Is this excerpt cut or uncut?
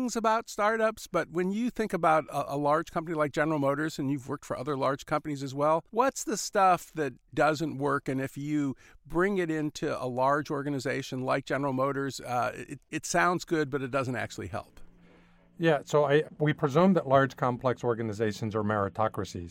cut